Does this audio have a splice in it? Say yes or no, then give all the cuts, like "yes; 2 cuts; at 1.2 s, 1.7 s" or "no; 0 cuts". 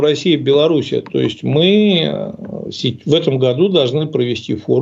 no; 0 cuts